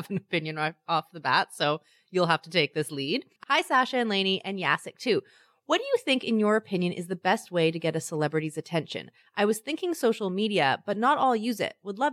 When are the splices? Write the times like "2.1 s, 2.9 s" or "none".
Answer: 3.4 s